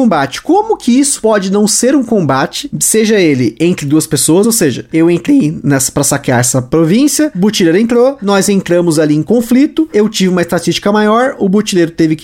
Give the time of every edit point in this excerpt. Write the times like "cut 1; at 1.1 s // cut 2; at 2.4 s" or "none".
none